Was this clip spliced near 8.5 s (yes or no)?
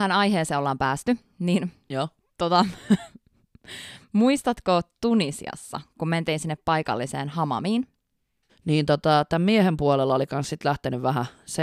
yes